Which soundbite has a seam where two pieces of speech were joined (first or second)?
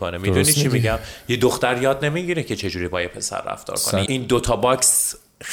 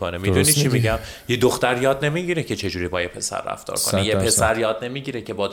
first